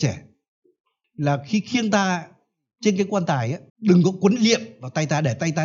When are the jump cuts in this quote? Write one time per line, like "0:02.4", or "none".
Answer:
0:01.0
0:03.7